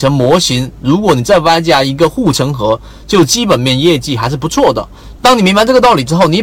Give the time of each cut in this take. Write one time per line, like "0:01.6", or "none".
0:05.2